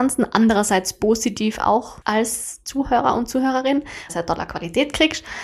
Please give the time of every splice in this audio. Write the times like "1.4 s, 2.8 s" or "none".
2.0 s, 4.1 s